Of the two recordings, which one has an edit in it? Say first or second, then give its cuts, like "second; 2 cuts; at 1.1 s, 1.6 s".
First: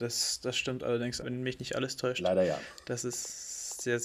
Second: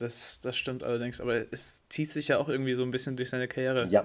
first; 1 cut; at 1.2 s